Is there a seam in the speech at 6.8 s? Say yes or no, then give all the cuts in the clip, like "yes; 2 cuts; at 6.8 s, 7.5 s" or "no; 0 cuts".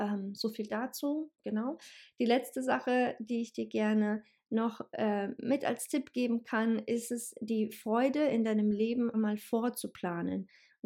no; 1 cut; at 9.1 s